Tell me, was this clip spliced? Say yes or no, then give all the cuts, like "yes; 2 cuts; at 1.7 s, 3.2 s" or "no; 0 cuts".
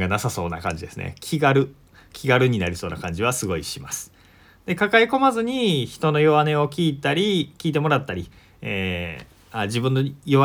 no; 0 cuts